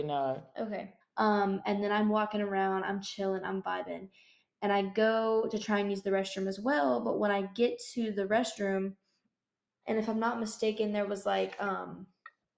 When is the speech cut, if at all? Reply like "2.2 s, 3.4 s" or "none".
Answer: 1.0 s, 9.8 s